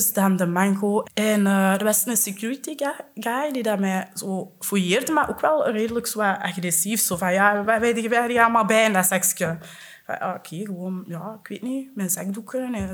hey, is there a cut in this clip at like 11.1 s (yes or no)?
no